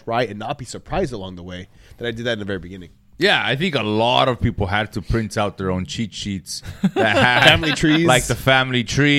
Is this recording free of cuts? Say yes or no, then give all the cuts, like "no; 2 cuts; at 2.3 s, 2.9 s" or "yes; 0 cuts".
yes; 0 cuts